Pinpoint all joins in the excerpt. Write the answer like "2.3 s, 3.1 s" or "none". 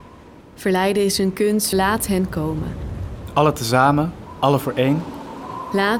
1.7 s